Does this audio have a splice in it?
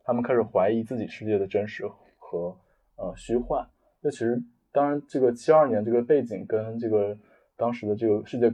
no; 0 cuts

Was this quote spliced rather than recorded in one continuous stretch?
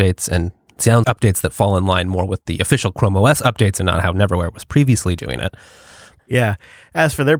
yes; 2 cuts; at 1.0 s, 6.2 s

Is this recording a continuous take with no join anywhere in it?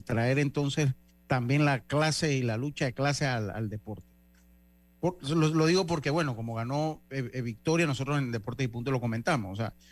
yes; 0 cuts

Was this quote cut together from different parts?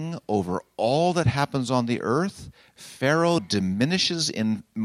yes; 1 cut; at 3.4 s

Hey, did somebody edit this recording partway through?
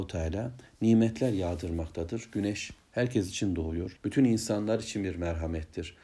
yes; 1 cut; at 4.0 s

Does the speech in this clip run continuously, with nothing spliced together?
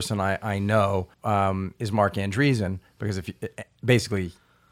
no; 1 cut; at 1.1 s

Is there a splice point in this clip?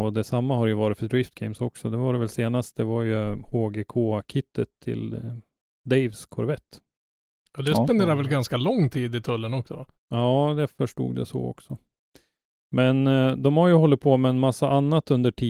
yes; 1 cut; at 10.0 s

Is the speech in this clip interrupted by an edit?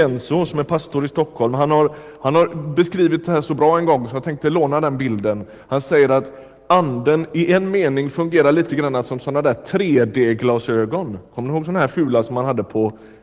no; 0 cuts

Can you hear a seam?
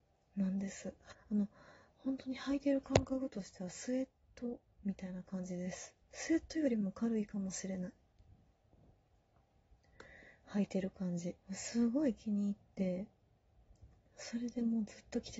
yes; 3 cuts; at 1.1 s, 6.0 s, 11.4 s

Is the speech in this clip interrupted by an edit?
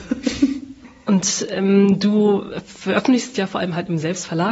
no; 0 cuts

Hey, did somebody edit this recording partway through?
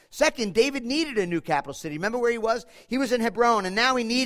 no; 0 cuts

